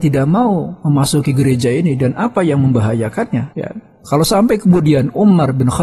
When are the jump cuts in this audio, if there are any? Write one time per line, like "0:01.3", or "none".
0:03.5